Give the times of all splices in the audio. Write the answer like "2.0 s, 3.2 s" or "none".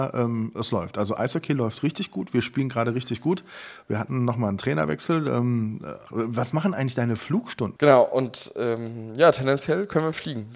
6.1 s, 7.8 s